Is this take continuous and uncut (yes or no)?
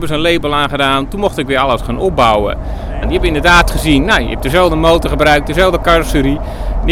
no